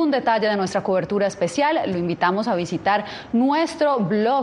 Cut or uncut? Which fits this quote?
uncut